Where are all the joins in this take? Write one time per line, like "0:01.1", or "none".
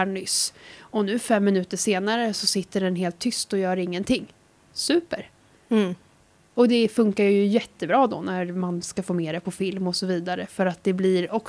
none